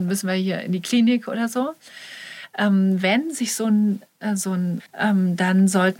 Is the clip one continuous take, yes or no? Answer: no